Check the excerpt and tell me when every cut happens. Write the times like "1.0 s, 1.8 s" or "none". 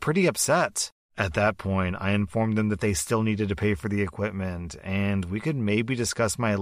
1.0 s